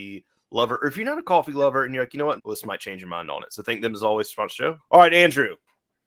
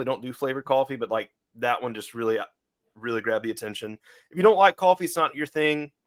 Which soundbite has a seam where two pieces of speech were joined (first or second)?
first